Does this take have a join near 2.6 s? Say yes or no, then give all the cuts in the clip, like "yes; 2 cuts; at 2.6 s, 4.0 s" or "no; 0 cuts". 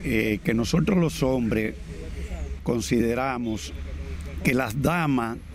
yes; 1 cut; at 2.6 s